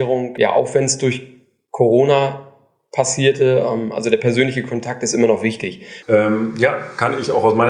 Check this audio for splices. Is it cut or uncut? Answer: cut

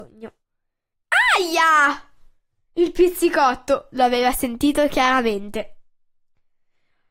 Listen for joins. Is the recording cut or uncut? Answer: uncut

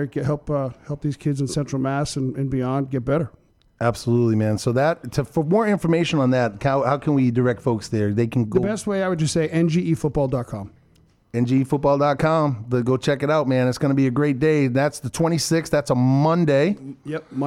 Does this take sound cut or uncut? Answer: uncut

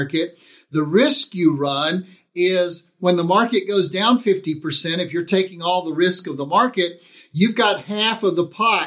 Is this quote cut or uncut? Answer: uncut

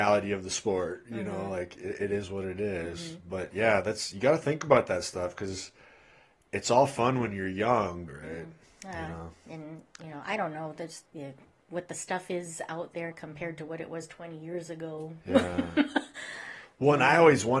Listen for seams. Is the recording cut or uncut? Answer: cut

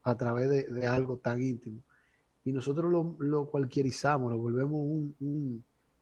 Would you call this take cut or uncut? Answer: uncut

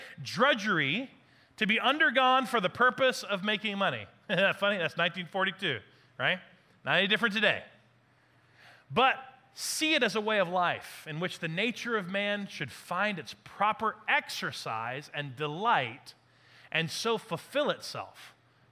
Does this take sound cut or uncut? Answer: uncut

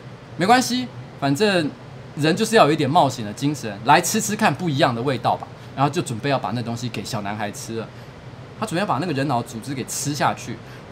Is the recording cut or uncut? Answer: cut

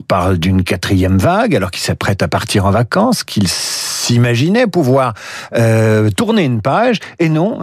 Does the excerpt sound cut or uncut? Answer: uncut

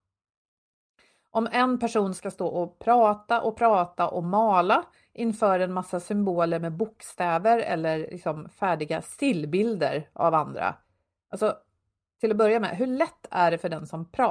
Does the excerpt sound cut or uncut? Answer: uncut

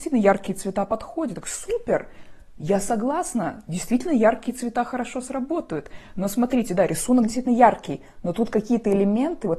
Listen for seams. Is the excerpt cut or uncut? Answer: uncut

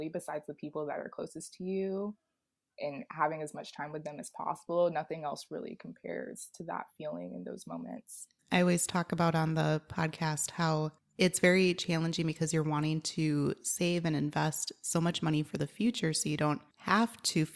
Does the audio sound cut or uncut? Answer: cut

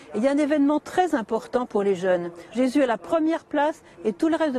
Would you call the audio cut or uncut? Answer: cut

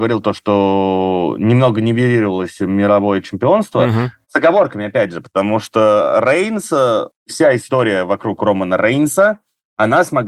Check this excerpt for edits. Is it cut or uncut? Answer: uncut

